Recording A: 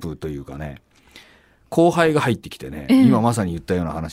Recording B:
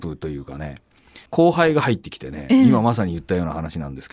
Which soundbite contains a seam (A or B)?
B